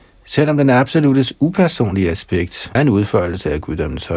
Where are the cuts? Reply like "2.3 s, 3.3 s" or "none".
2.8 s